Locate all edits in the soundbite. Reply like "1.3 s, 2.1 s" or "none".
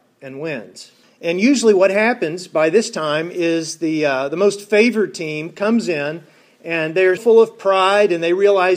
1.0 s, 7.2 s